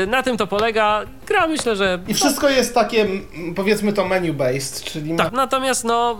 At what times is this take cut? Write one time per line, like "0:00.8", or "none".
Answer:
0:05.3